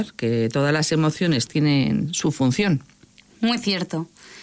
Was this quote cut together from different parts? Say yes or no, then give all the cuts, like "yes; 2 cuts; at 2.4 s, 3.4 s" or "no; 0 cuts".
yes; 1 cut; at 1.5 s